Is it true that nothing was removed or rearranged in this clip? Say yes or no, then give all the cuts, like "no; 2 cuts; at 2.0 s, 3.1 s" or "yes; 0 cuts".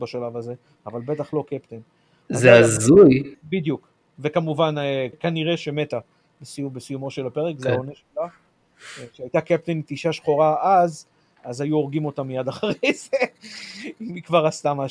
no; 2 cuts; at 3.3 s, 5.1 s